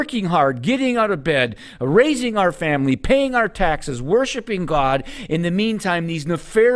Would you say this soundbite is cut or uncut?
uncut